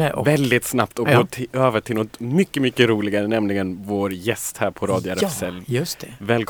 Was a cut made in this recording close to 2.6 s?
no; 0 cuts

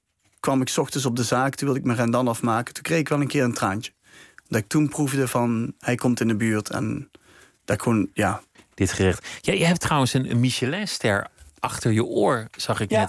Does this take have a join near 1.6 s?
no; 1 cut; at 8.6 s

